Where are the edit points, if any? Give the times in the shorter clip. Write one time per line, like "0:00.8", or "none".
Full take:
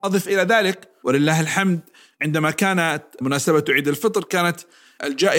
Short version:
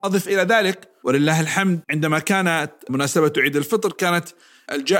0:01.8